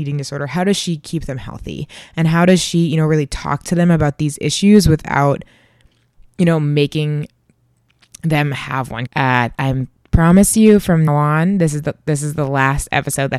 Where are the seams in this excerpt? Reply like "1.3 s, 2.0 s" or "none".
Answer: 9.1 s, 11.1 s